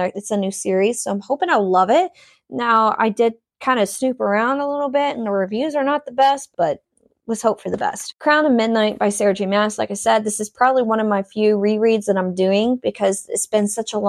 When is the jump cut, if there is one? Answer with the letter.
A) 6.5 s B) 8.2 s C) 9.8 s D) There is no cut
A